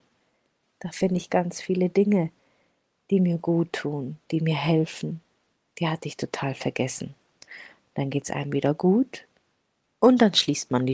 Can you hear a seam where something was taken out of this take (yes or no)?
yes